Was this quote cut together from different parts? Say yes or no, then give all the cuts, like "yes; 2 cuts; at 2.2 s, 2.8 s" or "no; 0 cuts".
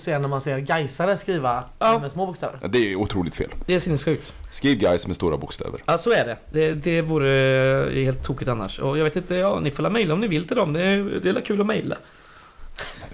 no; 0 cuts